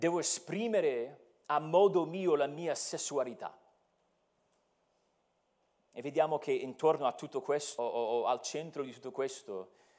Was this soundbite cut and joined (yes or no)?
yes